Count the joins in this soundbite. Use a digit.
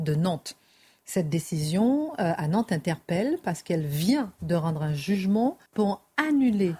1